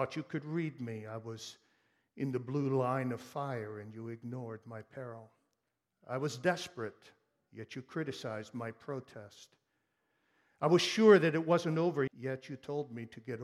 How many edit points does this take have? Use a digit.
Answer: 1